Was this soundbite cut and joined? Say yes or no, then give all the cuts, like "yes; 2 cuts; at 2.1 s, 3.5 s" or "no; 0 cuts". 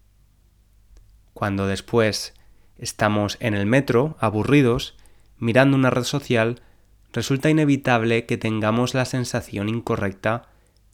no; 0 cuts